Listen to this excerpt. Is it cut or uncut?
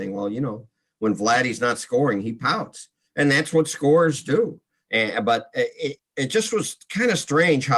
cut